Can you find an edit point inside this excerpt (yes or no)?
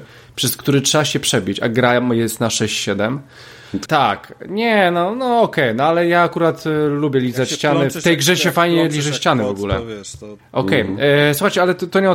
yes